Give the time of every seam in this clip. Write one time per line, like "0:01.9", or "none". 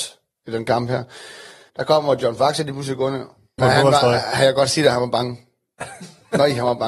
0:01.7
0:03.6